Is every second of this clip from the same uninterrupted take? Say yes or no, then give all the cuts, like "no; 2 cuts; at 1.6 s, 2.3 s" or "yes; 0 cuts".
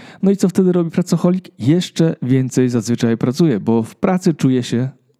yes; 0 cuts